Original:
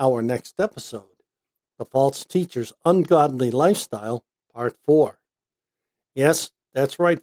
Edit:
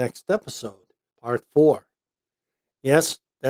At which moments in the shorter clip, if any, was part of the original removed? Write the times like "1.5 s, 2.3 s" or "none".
1.1 s